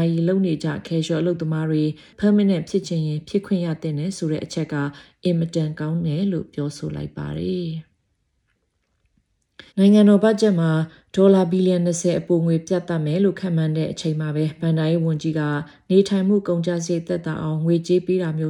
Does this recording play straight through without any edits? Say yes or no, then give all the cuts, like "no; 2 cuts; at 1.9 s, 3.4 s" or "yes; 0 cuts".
no; 1 cut; at 9.7 s